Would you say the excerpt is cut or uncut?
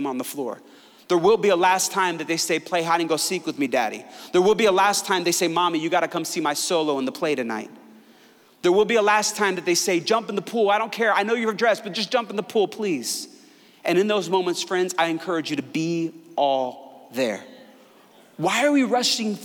uncut